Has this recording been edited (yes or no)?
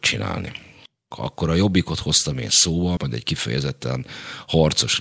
yes